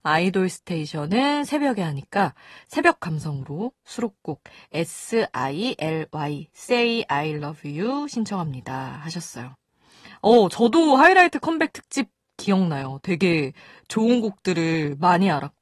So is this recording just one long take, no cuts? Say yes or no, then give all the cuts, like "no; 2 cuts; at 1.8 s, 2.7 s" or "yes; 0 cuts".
yes; 0 cuts